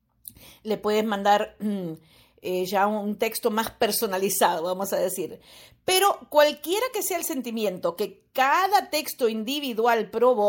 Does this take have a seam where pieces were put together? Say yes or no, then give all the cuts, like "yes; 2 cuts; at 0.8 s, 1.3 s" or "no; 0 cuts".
no; 0 cuts